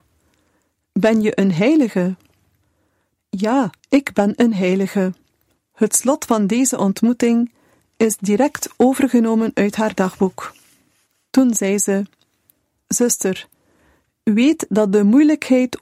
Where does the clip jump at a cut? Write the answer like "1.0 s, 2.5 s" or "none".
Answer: 3.8 s, 5.5 s, 11.3 s